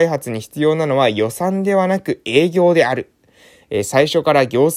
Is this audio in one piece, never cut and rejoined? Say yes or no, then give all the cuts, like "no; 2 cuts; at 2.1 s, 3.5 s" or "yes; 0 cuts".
yes; 0 cuts